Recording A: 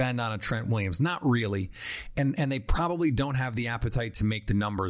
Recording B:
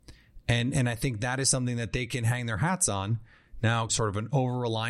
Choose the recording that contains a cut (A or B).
B